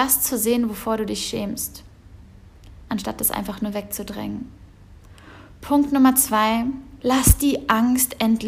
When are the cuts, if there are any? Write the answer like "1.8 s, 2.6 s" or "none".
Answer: 7.0 s